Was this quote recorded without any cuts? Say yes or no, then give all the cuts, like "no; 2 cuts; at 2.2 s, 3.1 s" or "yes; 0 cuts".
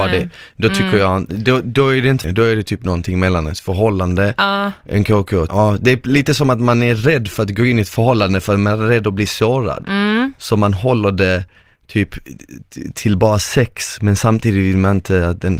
no; 2 cuts; at 2.2 s, 5.5 s